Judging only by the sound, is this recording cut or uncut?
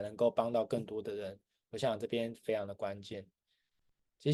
uncut